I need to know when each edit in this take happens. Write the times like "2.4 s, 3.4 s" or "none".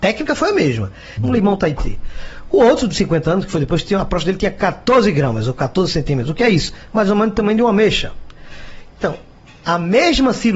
1.2 s